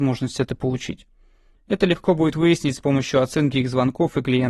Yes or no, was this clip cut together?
yes